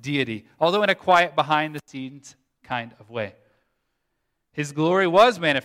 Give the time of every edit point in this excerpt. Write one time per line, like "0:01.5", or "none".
none